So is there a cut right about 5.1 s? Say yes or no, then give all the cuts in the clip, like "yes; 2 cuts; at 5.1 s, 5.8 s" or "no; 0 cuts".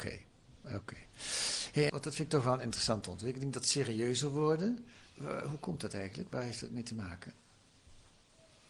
no; 1 cut; at 1.9 s